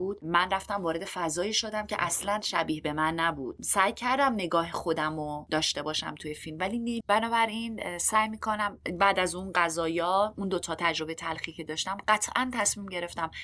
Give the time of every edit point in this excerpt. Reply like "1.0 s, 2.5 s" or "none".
7.0 s